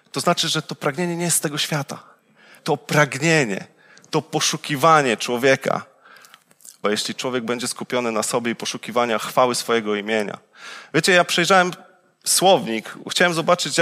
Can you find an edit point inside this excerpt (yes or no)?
yes